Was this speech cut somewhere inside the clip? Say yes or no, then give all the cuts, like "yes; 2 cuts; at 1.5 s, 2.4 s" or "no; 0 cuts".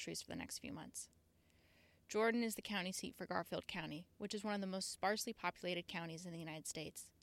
no; 0 cuts